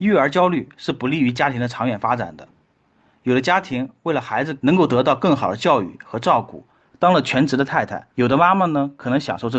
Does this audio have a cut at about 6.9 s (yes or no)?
yes